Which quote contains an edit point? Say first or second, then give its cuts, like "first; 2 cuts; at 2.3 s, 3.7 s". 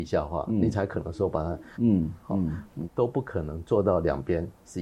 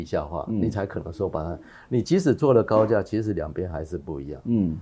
first; 2 cuts; at 1.7 s, 2.8 s